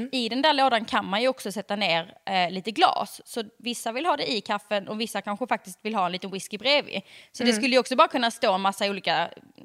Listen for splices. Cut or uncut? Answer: uncut